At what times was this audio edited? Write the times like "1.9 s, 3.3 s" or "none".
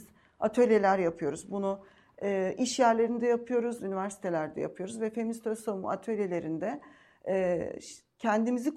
3.8 s